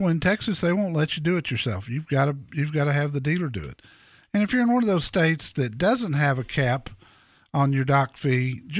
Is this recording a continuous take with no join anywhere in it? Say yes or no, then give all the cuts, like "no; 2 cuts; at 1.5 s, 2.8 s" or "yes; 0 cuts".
yes; 0 cuts